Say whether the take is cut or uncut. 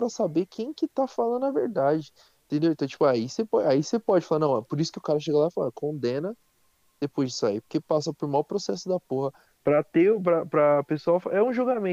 cut